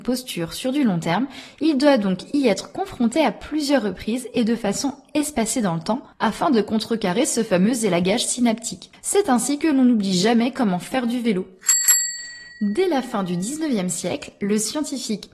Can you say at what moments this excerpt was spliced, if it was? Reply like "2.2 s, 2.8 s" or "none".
none